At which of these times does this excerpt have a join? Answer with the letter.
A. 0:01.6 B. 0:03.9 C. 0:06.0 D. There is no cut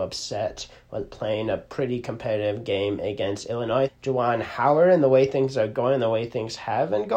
B